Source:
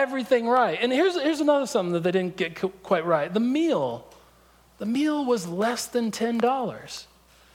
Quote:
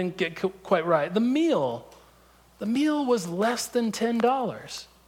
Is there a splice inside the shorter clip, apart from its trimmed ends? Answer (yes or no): no